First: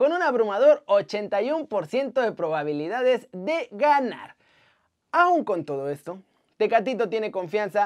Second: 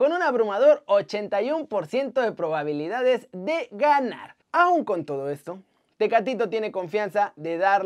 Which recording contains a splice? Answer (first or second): second